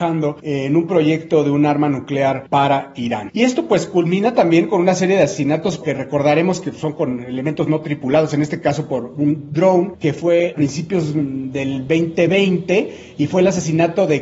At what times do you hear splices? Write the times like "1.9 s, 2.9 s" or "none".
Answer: none